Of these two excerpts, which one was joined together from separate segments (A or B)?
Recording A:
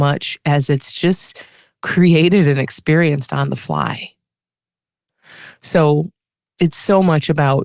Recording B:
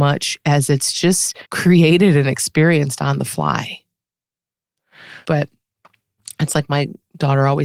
B